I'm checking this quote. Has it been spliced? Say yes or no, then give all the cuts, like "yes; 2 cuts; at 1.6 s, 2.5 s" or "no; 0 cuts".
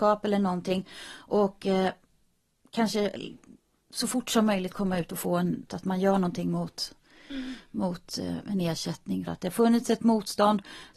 yes; 2 cuts; at 5.7 s, 9.3 s